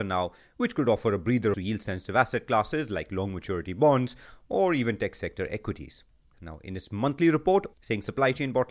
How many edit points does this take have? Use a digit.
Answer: 3